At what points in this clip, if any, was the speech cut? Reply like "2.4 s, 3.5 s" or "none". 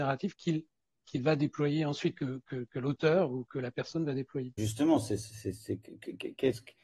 4.6 s